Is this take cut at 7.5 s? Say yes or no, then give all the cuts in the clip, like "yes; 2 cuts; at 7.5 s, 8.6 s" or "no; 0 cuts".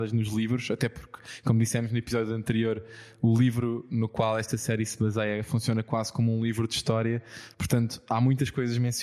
no; 0 cuts